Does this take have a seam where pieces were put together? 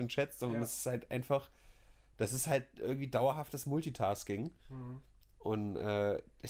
no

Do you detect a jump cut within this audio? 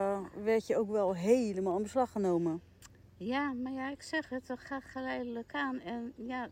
no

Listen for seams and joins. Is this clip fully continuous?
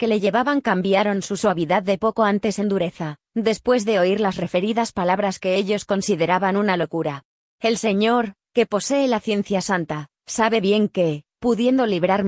no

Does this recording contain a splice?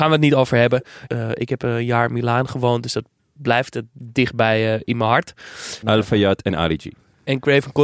yes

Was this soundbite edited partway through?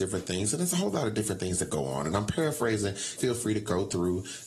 yes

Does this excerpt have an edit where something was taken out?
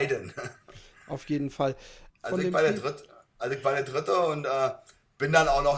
yes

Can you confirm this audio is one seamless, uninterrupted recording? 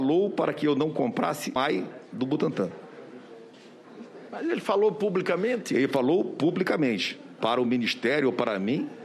no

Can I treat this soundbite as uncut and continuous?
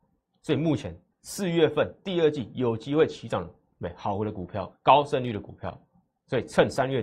no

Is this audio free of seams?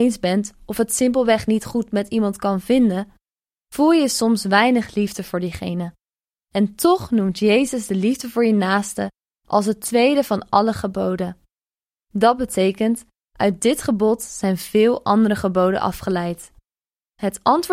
yes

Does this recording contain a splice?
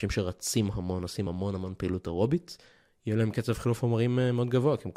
no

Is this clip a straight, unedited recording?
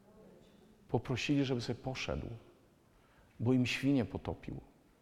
yes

